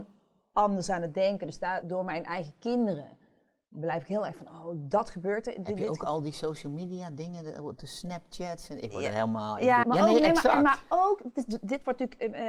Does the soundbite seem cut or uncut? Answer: cut